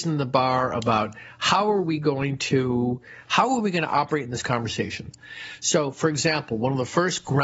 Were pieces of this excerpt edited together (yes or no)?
no